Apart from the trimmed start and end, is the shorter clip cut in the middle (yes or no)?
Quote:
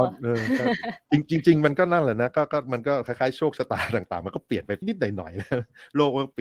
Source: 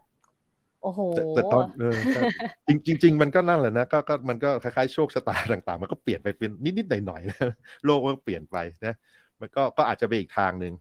yes